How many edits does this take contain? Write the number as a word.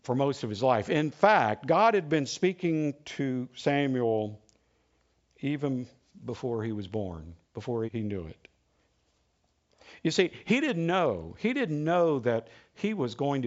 one